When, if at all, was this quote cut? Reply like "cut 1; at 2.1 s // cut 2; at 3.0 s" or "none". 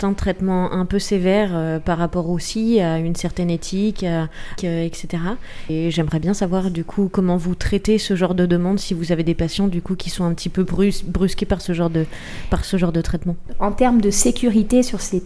cut 1; at 4.6 s // cut 2; at 13.5 s